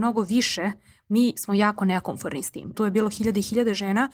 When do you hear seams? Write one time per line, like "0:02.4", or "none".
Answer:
0:02.7